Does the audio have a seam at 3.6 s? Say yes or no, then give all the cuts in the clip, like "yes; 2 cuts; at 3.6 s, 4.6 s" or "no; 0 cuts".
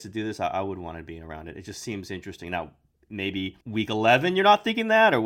yes; 1 cut; at 3.6 s